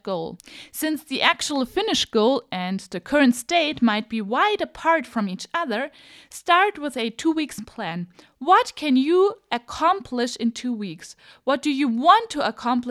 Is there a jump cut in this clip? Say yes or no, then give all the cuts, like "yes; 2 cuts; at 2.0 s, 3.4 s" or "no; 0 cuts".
no; 0 cuts